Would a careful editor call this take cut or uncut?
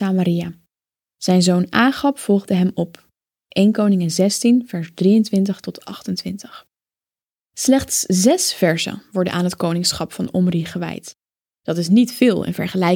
uncut